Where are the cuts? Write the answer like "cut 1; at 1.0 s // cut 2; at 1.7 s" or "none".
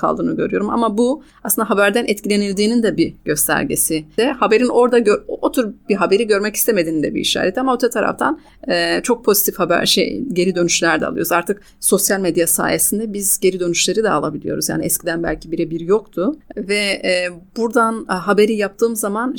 cut 1; at 4.2 s // cut 2; at 16.5 s